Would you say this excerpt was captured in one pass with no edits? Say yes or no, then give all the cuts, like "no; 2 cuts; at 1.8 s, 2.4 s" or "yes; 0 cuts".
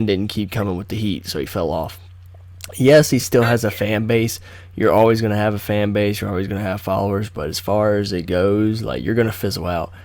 yes; 0 cuts